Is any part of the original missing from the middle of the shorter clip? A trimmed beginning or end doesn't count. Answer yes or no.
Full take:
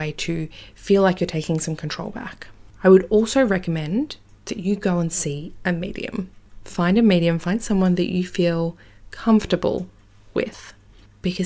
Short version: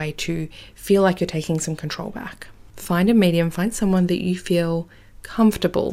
yes